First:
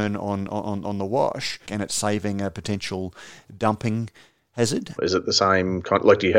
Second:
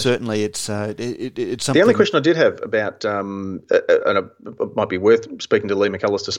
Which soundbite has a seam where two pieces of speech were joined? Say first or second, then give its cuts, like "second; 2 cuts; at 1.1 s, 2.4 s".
first; 2 cuts; at 1.7 s, 5.0 s